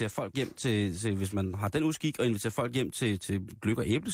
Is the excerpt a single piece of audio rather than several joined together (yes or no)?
no